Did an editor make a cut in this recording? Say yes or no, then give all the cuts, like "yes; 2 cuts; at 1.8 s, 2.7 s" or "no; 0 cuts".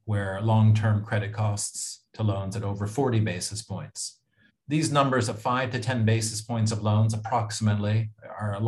yes; 1 cut; at 4.5 s